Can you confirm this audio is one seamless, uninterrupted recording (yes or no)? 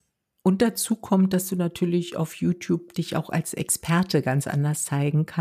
yes